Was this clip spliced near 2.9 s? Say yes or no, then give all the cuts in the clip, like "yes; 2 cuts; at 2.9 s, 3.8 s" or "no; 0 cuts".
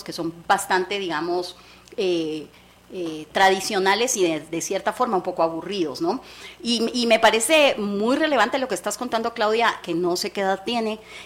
no; 1 cut; at 9.8 s